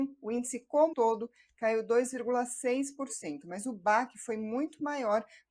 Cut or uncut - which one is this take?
cut